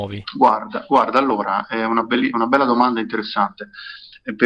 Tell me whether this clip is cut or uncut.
uncut